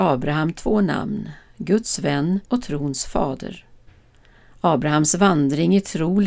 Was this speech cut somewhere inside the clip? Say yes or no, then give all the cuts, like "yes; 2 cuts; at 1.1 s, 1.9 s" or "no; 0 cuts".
yes; 1 cut; at 2.4 s